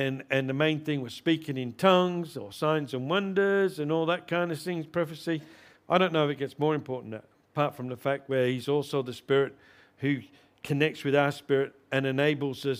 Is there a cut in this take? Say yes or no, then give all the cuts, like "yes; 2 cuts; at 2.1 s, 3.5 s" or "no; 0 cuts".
yes; 1 cut; at 5.8 s